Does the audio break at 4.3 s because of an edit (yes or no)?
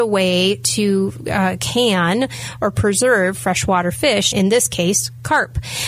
yes